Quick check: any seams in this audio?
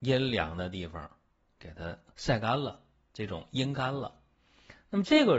no; 0 cuts

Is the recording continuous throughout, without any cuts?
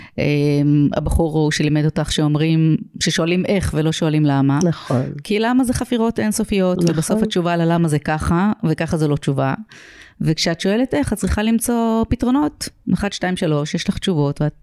yes; 0 cuts

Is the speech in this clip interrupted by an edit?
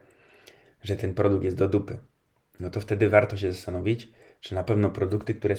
no; 0 cuts

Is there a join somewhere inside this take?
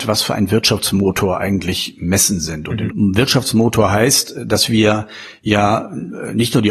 yes; 1 cut; at 2.9 s

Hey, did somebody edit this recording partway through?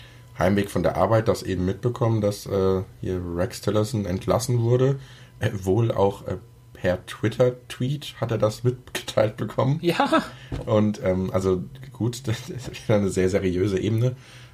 no; 0 cuts

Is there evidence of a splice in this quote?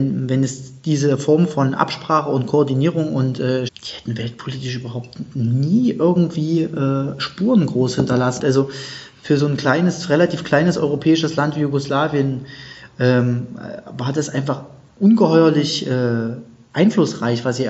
yes; 2 cuts; at 3.7 s, 8.4 s

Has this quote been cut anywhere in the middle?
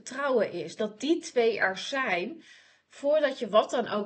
no; 0 cuts

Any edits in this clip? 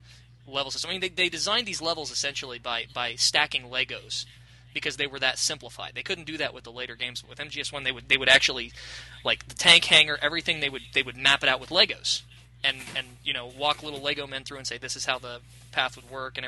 no; 0 cuts

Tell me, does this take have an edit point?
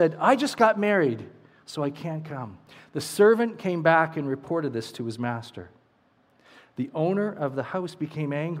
no; 0 cuts

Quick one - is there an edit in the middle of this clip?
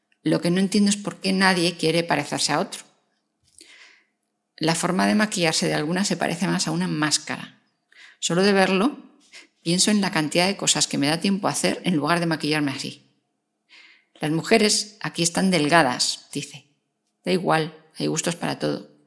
yes; 2 cuts; at 14.1 s, 16.3 s

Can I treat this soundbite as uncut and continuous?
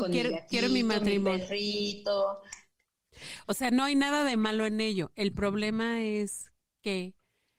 yes; 0 cuts

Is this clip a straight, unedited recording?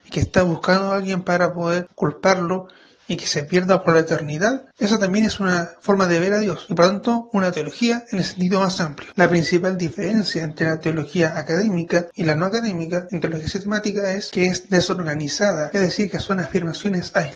no; 2 cuts; at 4.7 s, 13.1 s

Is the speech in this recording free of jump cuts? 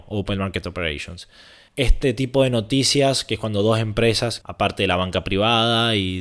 no; 2 cuts; at 1.7 s, 4.4 s

